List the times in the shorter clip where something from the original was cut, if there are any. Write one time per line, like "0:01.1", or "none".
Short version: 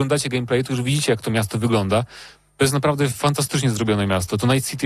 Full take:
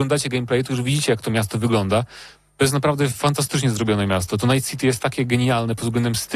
none